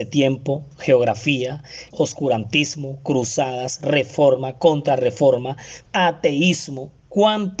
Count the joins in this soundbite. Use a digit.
2